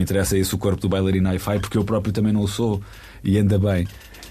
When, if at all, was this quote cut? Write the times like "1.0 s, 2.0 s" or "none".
none